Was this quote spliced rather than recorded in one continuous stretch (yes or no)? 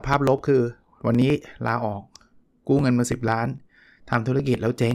no